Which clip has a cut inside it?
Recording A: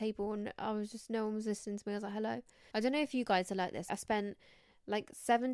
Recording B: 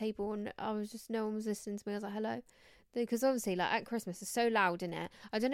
A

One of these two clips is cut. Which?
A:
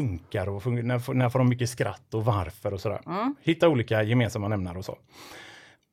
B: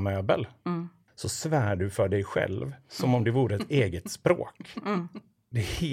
B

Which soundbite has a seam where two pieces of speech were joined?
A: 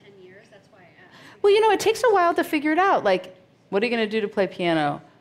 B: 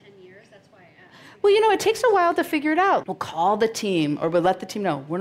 B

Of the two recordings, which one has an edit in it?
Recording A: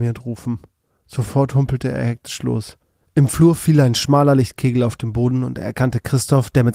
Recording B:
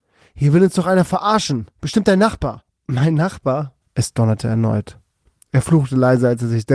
B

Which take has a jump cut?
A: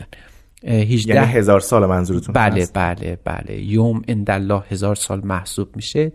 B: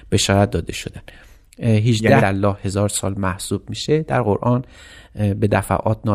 B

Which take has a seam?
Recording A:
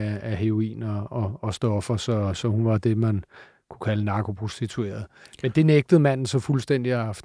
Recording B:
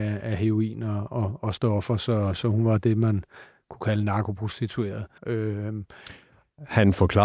B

